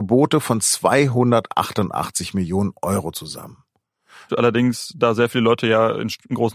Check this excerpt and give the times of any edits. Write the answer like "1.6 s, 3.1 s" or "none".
4.3 s